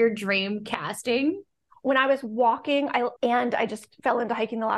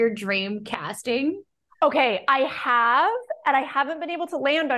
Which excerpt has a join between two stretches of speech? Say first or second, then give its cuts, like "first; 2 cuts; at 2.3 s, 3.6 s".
first; 2 cuts; at 1.7 s, 3.2 s